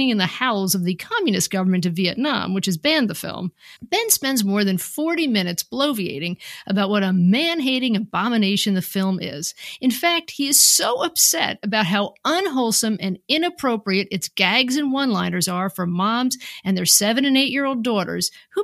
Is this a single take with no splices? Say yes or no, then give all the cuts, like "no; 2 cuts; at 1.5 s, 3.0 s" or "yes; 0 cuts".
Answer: no; 1 cut; at 3.8 s